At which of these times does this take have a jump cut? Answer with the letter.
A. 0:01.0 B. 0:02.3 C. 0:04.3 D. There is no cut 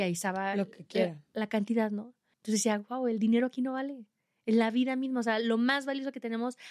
B